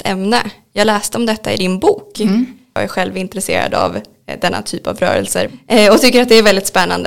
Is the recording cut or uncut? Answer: uncut